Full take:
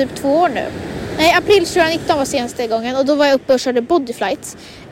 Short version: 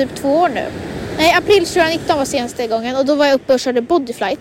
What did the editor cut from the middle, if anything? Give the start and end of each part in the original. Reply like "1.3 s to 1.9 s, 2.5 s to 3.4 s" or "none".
none